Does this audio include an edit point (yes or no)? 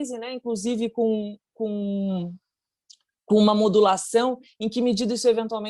no